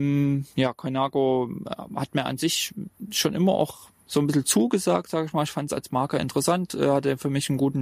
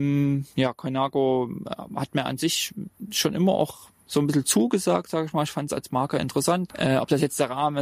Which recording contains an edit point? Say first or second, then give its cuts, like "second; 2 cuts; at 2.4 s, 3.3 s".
second; 1 cut; at 6.7 s